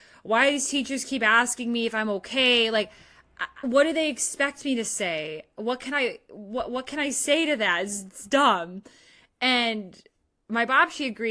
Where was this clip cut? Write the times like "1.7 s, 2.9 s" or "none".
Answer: 3.6 s